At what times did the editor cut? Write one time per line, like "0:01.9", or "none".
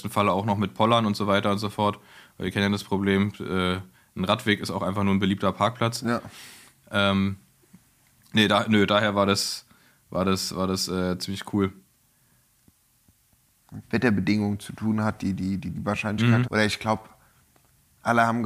0:13.8
0:16.4